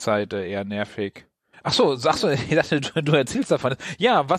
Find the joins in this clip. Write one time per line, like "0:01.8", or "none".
0:01.5